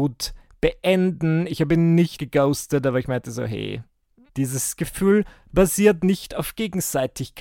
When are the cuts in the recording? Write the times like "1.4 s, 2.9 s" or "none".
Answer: 2.2 s, 4.3 s

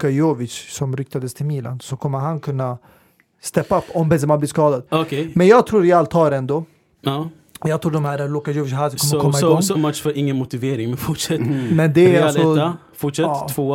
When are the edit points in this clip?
9.7 s

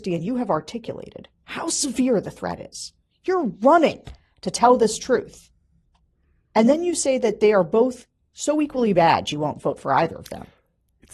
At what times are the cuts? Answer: none

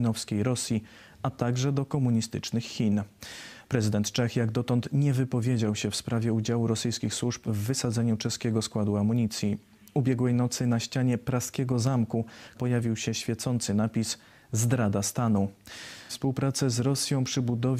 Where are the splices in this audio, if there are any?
12.5 s, 16.1 s

